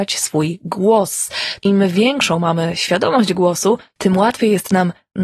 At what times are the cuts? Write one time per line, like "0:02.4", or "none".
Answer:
0:01.6